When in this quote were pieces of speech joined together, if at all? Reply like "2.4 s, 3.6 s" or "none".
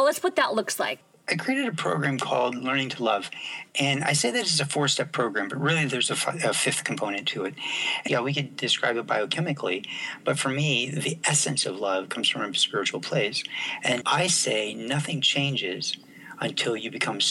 8.1 s, 14.0 s